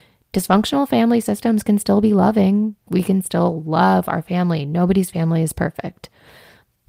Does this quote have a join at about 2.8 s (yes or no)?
no